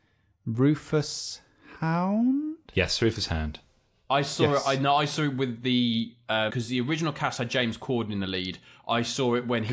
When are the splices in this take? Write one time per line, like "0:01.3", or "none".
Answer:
0:06.5

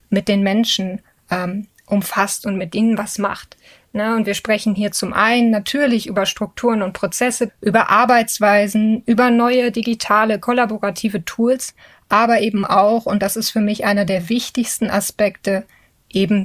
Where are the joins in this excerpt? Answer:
0:07.5

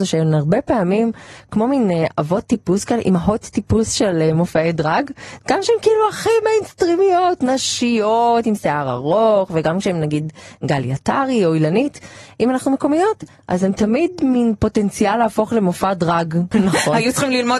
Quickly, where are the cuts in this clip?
0:16.5

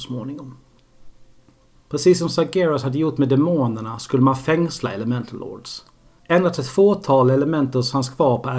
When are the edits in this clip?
0:01.7
0:06.2

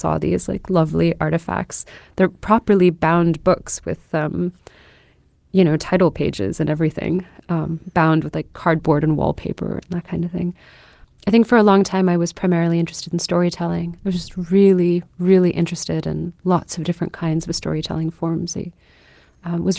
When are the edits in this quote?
none

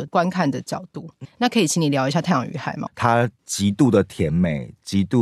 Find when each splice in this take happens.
0:01.2
0:02.9

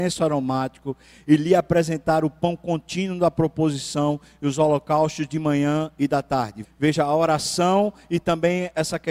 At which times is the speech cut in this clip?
0:06.6

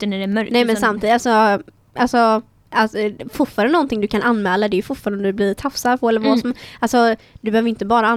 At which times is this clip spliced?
none

